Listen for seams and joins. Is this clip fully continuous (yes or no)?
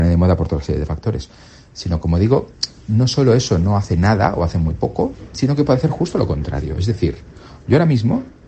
yes